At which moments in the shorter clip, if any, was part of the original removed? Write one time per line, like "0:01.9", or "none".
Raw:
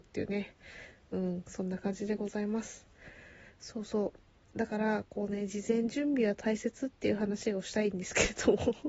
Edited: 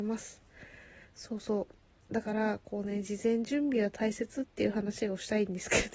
none